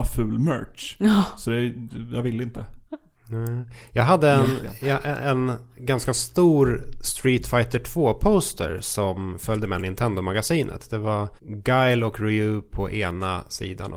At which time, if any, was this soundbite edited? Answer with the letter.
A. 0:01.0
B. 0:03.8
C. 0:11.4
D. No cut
C